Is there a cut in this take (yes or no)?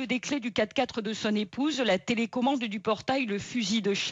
no